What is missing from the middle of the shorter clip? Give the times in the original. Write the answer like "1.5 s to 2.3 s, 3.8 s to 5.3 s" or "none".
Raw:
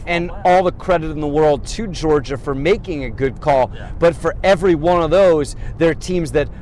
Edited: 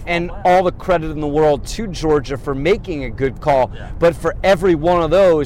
none